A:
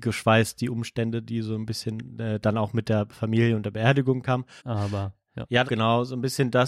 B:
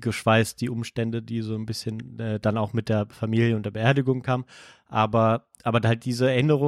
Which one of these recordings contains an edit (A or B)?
A